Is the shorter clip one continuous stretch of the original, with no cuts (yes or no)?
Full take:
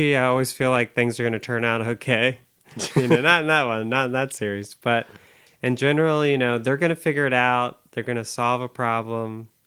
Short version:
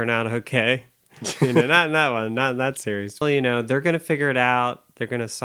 no